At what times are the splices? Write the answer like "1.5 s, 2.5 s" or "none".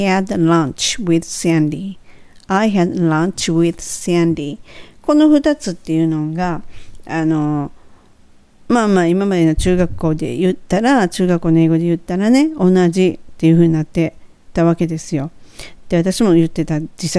none